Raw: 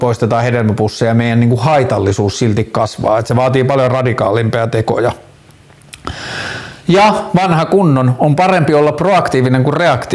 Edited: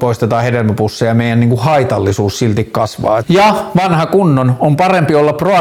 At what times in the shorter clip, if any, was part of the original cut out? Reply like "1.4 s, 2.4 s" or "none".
3.2 s